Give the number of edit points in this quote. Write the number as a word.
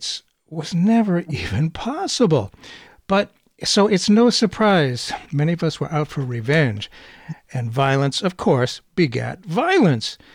two